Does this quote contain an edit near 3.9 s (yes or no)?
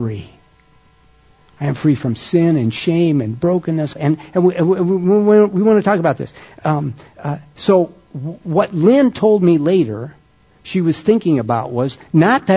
yes